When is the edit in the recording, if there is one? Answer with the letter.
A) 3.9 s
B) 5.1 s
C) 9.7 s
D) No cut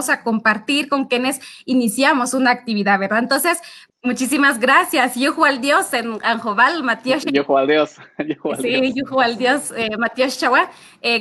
A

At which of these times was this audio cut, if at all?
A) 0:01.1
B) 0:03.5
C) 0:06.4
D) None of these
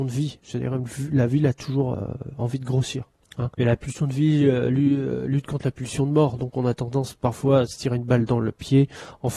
B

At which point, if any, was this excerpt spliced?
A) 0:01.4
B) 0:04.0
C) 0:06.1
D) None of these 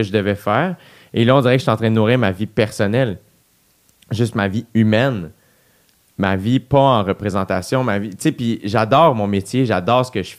D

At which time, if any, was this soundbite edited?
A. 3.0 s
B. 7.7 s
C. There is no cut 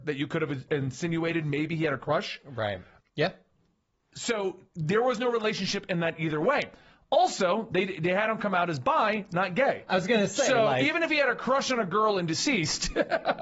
A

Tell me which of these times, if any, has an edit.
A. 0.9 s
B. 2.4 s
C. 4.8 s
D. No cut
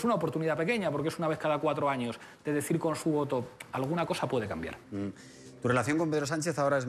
C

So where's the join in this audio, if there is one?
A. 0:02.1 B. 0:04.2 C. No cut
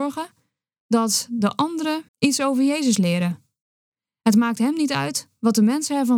A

